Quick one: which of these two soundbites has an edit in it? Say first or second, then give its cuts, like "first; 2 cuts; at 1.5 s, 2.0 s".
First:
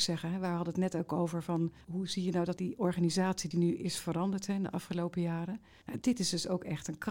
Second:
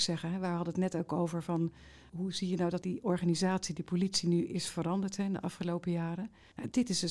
first; 2 cuts; at 1.8 s, 3.5 s